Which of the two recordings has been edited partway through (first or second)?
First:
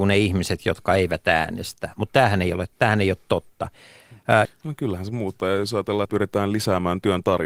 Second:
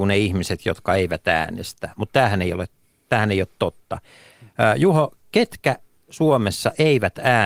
first